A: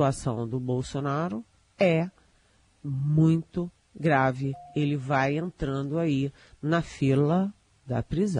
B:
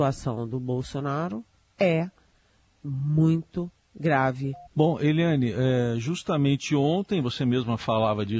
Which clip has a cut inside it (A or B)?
B